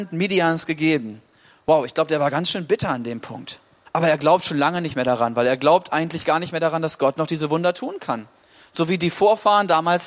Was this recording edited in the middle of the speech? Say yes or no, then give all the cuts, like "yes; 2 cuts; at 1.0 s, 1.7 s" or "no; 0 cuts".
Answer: yes; 1 cut; at 3.9 s